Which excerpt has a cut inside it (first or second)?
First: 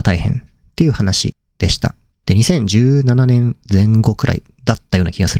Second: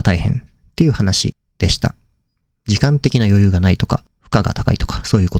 first